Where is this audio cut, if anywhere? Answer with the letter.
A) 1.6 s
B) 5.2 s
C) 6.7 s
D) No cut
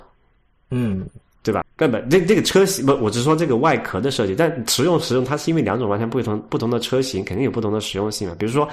A